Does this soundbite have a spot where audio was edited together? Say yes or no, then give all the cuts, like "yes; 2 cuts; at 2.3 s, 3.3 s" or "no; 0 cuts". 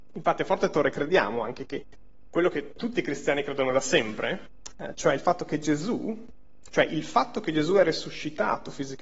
no; 0 cuts